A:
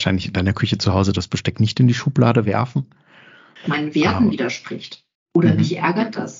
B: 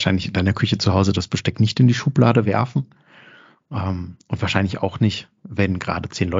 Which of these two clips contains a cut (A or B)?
A